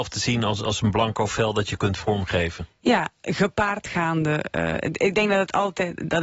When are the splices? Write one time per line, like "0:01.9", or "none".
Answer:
none